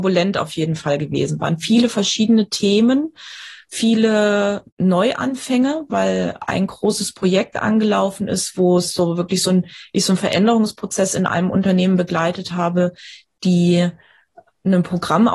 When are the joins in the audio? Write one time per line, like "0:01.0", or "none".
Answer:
0:04.7